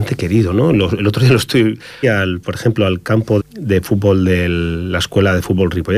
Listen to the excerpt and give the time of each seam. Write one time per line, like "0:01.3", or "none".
0:02.0
0:03.4